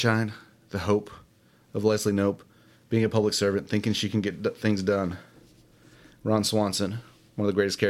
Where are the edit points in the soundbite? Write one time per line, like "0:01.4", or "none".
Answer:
none